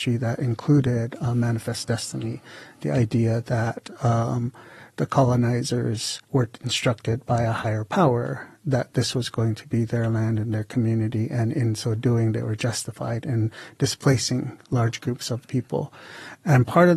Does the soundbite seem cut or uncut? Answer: cut